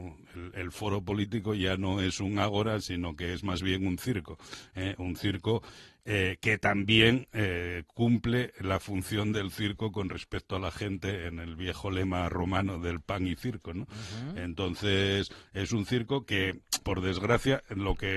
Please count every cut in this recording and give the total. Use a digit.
1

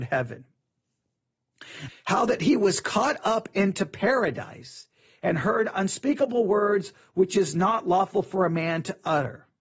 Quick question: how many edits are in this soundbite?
1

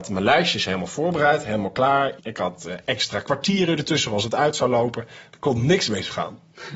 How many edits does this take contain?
1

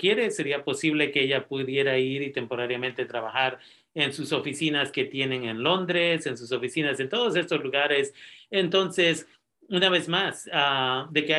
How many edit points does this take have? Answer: 0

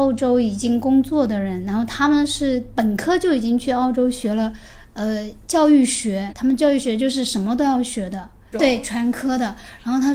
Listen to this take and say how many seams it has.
2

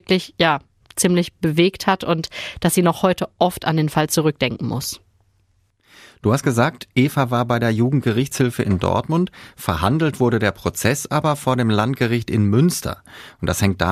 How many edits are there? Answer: 0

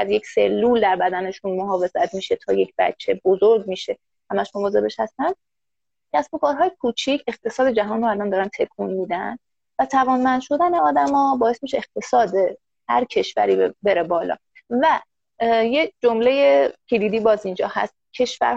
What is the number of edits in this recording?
0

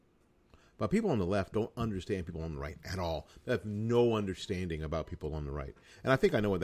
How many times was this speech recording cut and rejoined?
0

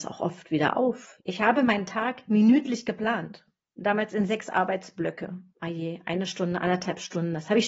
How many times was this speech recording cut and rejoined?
3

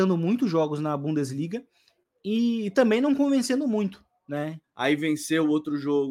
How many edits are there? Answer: 1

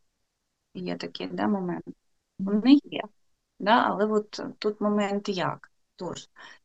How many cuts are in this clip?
1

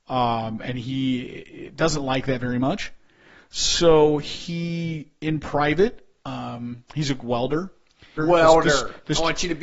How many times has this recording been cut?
1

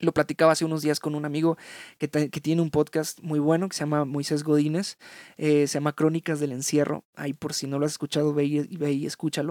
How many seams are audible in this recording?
0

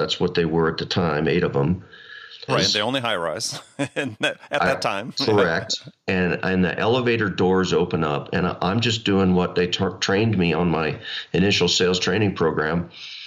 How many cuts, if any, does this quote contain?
1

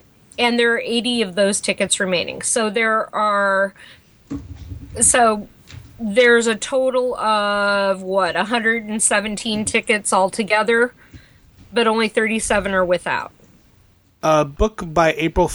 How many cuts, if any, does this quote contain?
1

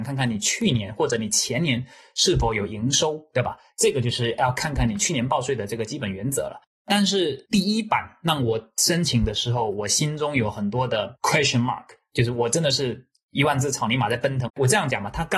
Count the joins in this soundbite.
2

